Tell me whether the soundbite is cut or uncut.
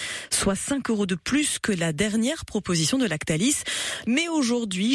cut